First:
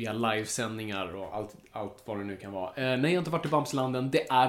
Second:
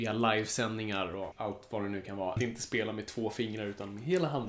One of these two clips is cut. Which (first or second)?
second